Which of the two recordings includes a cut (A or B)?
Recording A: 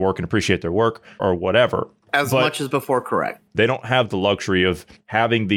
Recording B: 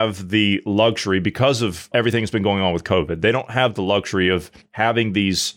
A